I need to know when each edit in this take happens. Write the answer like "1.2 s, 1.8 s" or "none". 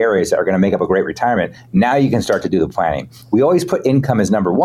none